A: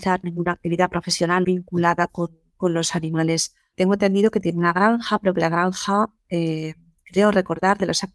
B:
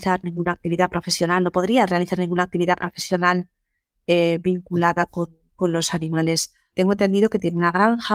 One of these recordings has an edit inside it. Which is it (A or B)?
A